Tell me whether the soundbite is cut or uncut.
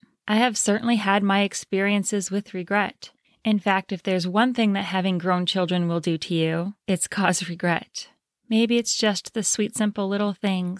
cut